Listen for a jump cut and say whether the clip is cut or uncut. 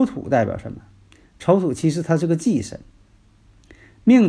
uncut